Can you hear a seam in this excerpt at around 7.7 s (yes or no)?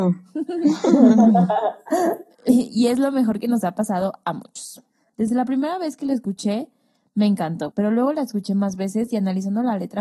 yes